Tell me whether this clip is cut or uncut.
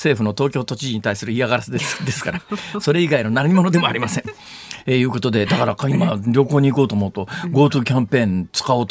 uncut